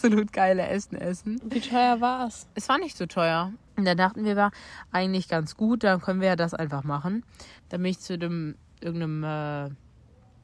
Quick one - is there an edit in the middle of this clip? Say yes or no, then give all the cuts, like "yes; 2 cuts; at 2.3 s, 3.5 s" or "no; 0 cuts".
yes; 2 cuts; at 3.7 s, 7.6 s